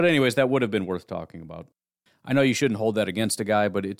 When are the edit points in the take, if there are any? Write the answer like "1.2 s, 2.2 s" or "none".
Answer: 2.1 s